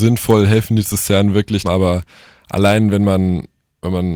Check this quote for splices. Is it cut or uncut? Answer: cut